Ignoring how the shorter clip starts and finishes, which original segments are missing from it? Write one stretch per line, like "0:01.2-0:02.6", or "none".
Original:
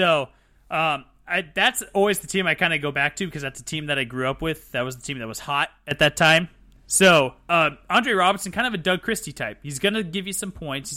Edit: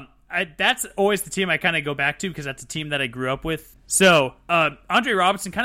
0:04.7-0:06.7